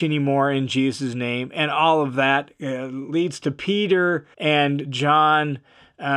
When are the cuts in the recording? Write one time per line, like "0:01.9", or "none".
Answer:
0:04.3